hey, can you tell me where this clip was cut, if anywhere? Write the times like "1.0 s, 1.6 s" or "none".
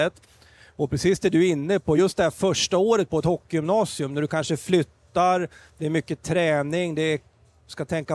none